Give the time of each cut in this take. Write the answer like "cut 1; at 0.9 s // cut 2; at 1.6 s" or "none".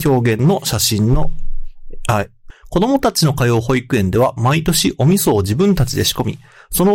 cut 1; at 2.5 s